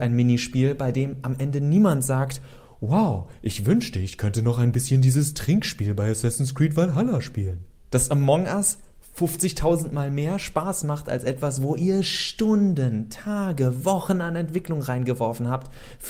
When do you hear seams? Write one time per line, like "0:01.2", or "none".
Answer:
0:07.8

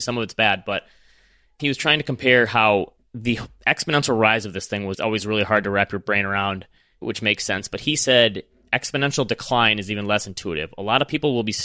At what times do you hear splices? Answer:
0:04.9

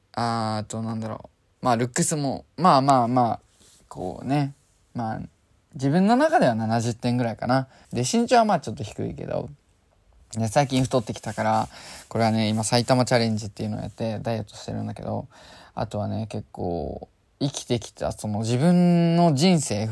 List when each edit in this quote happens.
0:07.8

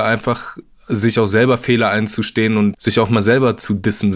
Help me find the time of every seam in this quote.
0:02.7

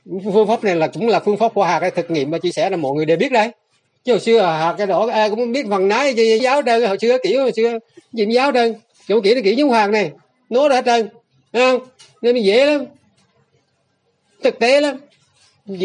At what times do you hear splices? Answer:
0:06.4

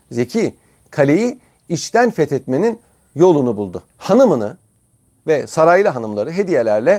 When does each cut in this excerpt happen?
0:03.9

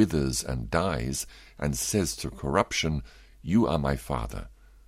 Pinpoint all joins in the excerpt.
none

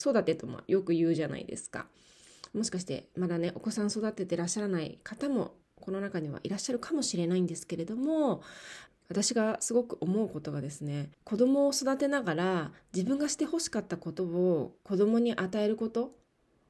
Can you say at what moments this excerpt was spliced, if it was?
0:08.9
0:11.1

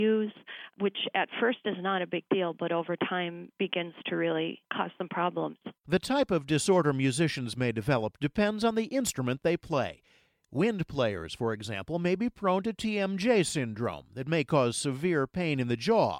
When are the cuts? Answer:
none

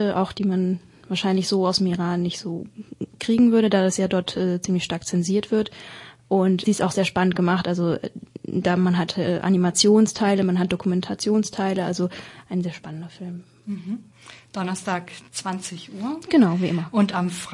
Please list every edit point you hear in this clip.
none

